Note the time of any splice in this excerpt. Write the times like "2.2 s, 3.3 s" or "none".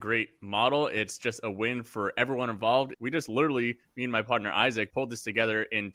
2.9 s, 4.9 s